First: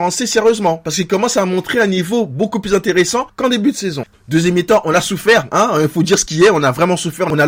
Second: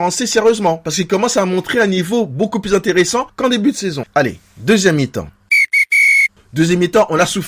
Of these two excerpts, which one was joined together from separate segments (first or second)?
first